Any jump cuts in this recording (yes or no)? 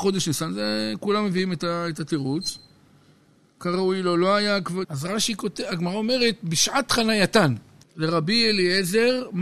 yes